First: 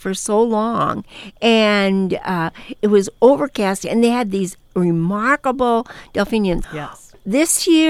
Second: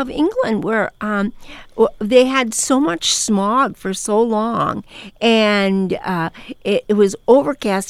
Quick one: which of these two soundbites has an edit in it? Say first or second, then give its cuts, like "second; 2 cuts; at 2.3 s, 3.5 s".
first; 2 cuts; at 2.8 s, 6.6 s